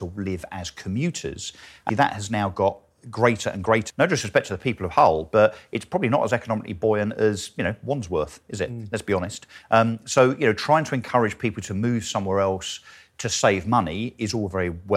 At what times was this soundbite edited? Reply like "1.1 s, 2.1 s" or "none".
1.9 s, 3.9 s